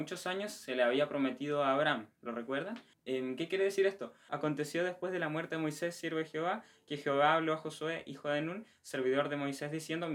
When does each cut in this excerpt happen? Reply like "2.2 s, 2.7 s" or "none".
2.9 s, 4.3 s